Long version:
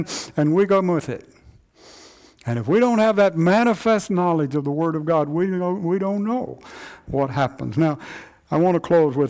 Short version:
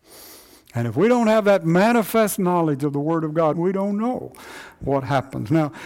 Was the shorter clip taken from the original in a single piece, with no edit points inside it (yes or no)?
no